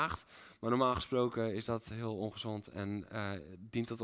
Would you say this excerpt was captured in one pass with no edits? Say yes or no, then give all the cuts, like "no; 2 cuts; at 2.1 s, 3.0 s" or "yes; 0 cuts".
yes; 0 cuts